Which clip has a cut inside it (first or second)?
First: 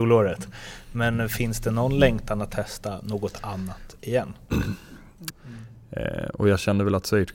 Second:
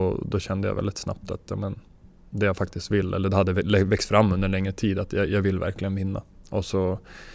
first